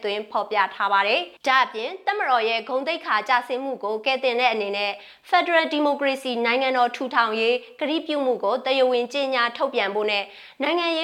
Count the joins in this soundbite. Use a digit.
1